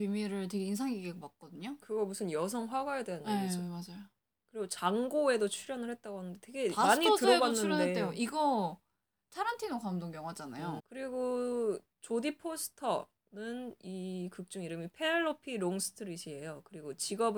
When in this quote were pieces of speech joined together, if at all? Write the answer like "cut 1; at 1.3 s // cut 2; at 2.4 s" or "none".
cut 1; at 1.8 s // cut 2; at 10.8 s